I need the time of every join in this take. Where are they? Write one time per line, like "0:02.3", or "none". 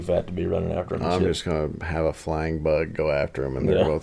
none

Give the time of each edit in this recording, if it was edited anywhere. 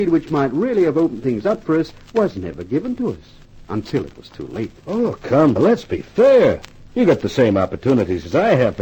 0:05.6

